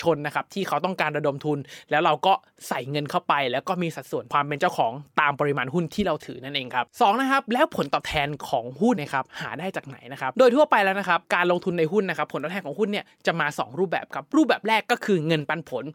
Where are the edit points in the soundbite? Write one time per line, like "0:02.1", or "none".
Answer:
0:09.0